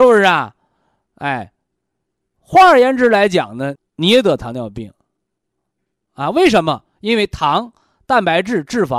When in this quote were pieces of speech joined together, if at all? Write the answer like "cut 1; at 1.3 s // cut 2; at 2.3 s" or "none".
cut 1; at 3.8 s

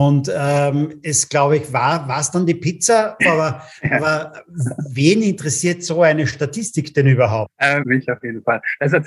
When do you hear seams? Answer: cut 1; at 3.2 s // cut 2; at 7.8 s

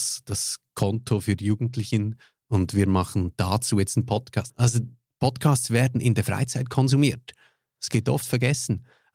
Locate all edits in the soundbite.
cut 1; at 4.5 s

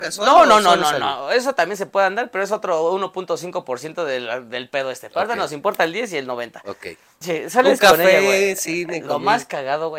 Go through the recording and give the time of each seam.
cut 1; at 7.2 s

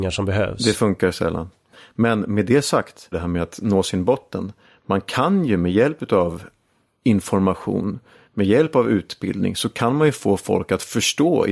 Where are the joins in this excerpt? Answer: cut 1; at 3.1 s

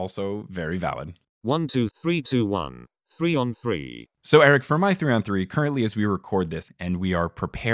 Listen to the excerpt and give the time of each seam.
cut 1; at 1.9 s // cut 2; at 6.7 s

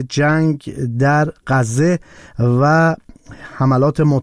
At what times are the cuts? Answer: none

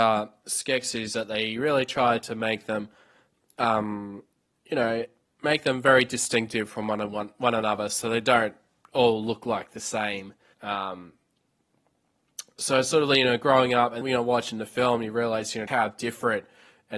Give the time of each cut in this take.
cut 1; at 10.5 s // cut 2; at 14.0 s // cut 3; at 15.7 s

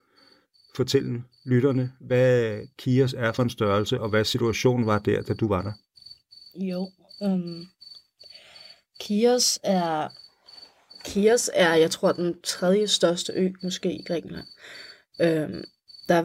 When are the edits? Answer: none

